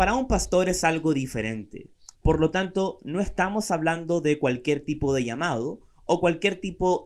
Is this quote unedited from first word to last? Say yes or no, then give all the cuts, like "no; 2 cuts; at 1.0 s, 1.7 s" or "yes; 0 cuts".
no; 1 cut; at 2.1 s